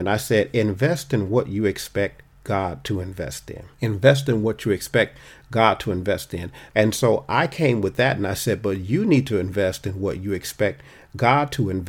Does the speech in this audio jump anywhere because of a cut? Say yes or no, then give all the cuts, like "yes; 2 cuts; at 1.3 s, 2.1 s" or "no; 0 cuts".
yes; 2 cuts; at 3.7 s, 6.7 s